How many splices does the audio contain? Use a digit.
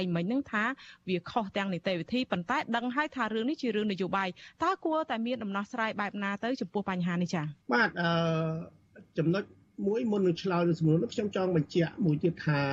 1